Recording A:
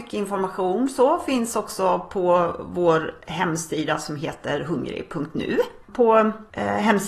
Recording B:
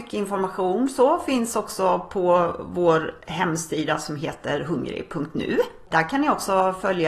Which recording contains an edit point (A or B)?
A